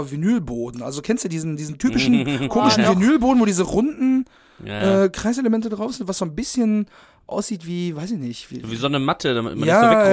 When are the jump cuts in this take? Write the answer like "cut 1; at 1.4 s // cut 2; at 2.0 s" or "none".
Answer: none